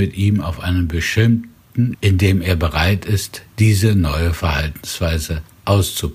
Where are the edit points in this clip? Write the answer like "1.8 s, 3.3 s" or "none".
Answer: 1.9 s